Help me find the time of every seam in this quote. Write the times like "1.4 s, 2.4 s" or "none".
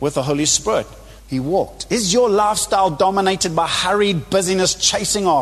1.2 s